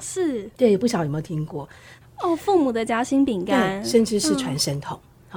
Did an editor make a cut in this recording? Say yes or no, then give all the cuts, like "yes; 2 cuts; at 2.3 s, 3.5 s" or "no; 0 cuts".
yes; 1 cut; at 2.0 s